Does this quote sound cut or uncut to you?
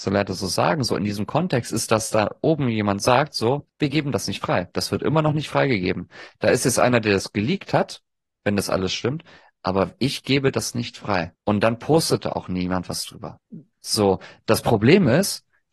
uncut